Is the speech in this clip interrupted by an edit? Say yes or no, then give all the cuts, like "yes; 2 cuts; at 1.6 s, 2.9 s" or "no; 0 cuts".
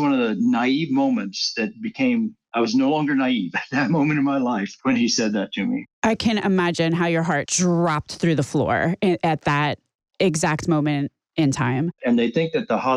yes; 2 cuts; at 7.5 s, 12.0 s